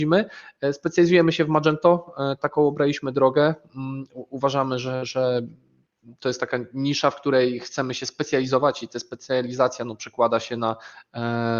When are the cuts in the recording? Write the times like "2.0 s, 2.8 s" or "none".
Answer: none